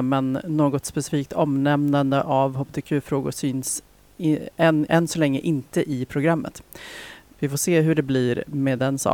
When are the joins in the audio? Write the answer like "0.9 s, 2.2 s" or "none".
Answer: 4.9 s, 7.3 s

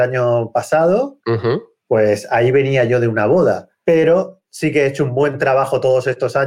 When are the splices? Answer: 1.2 s, 3.7 s

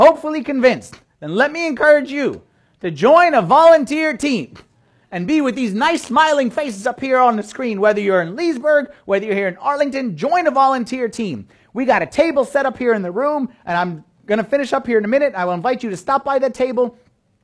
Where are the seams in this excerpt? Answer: none

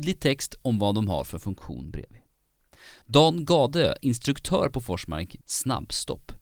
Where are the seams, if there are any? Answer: 5.4 s

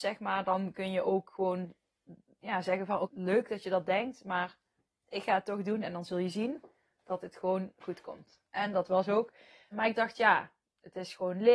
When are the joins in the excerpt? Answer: 3.0 s, 9.7 s

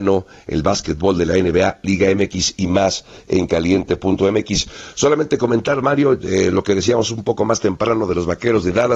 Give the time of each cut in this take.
none

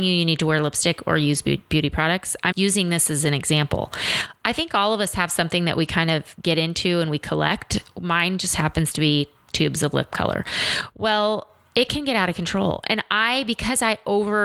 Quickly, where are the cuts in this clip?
2.5 s

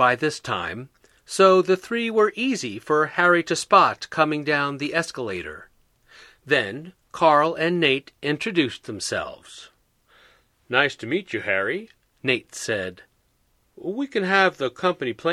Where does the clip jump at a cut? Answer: none

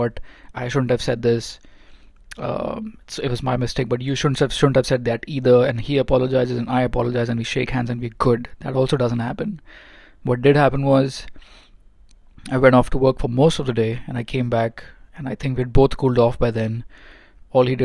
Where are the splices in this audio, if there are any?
none

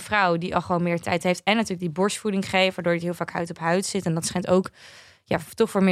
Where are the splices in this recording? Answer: none

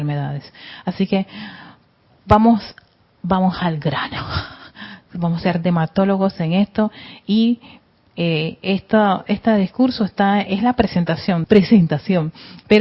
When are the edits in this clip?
11.4 s

